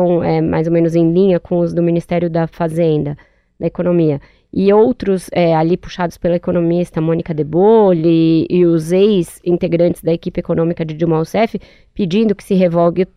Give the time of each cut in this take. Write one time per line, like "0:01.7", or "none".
none